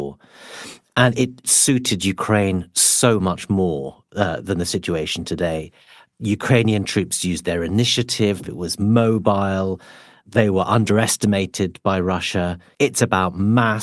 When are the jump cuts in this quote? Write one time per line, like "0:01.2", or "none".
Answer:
0:08.4
0:12.7